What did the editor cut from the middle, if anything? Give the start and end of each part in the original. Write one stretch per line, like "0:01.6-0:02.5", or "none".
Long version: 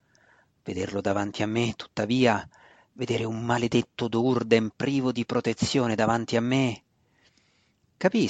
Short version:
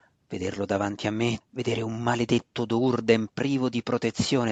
0:01.8-0:02.8